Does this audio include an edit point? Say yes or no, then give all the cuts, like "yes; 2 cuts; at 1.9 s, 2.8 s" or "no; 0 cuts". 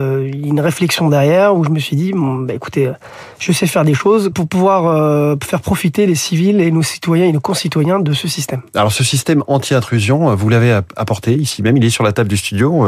yes; 1 cut; at 4.3 s